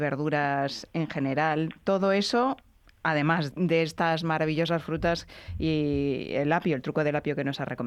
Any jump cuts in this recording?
yes; 1 cut; at 3.5 s

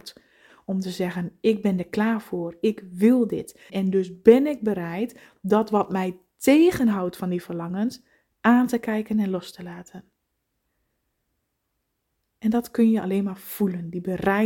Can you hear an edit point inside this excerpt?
yes; 1 cut; at 3.7 s

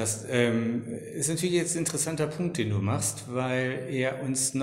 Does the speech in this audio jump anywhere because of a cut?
no; 0 cuts

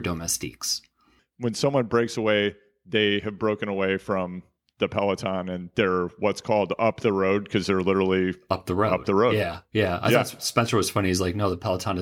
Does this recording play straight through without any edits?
no; 1 cut; at 1.2 s

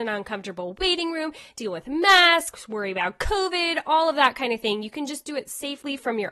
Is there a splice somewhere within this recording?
no; 0 cuts

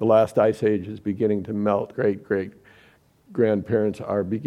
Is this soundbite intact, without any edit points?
no; 1 cut; at 1.9 s

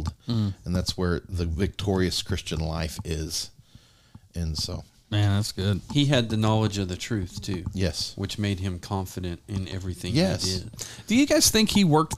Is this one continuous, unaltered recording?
yes; 0 cuts

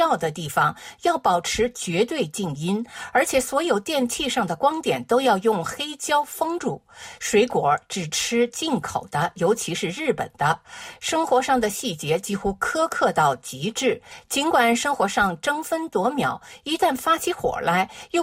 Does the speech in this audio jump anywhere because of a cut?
no; 0 cuts

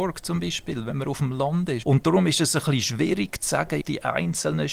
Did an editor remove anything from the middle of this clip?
yes; 2 cuts; at 1.8 s, 3.8 s

